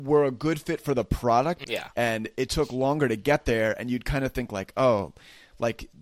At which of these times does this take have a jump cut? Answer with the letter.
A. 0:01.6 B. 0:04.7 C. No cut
A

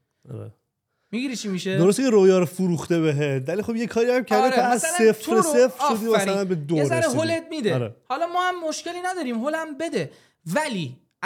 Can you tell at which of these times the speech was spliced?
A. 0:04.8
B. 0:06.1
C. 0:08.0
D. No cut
D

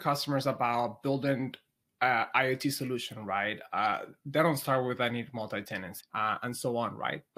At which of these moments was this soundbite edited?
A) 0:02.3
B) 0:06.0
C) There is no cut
B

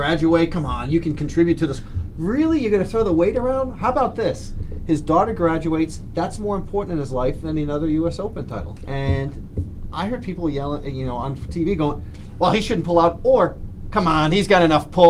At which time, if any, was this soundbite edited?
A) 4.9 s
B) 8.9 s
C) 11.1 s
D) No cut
B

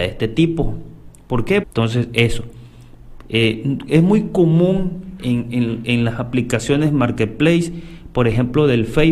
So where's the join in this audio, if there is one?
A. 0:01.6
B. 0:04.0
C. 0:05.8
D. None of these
A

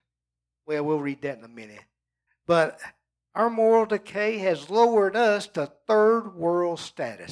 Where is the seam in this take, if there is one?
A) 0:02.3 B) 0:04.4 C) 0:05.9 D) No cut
A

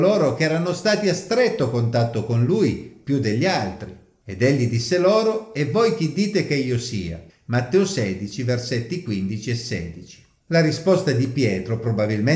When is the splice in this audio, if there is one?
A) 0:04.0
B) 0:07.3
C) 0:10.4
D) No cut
B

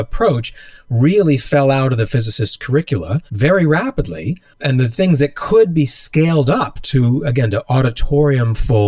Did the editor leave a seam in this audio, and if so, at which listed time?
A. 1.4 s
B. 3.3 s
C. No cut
B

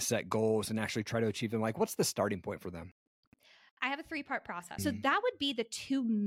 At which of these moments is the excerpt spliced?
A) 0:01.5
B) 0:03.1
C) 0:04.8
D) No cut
C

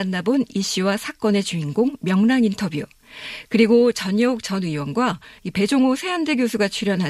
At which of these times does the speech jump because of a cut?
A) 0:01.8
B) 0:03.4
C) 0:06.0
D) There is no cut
D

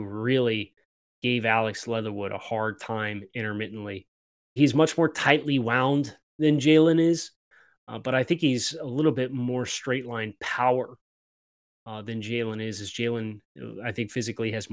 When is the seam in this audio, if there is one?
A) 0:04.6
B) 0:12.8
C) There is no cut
A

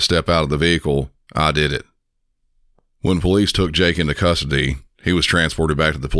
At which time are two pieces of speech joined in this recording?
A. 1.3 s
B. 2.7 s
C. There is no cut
A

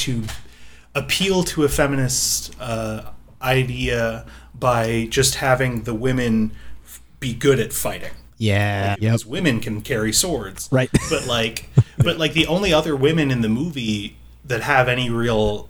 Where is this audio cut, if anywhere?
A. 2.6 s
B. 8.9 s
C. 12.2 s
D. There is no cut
B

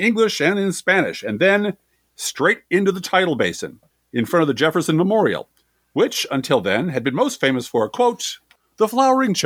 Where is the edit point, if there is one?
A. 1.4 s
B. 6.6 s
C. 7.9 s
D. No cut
D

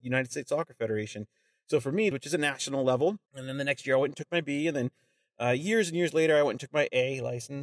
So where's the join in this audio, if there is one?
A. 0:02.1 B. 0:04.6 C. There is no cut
A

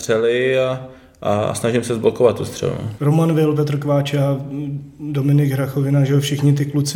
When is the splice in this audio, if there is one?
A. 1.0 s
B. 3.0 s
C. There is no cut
B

